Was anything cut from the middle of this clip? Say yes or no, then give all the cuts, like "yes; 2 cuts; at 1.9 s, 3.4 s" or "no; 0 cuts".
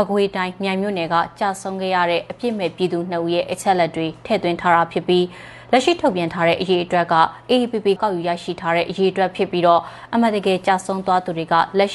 yes; 1 cut; at 8.0 s